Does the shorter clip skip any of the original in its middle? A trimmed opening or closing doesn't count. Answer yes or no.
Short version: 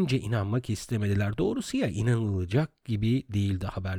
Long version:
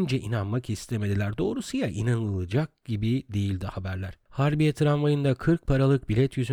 no